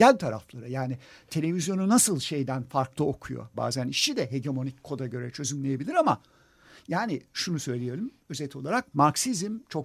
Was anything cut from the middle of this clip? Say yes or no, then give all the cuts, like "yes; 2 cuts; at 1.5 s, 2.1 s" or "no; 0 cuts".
yes; 1 cut; at 3.5 s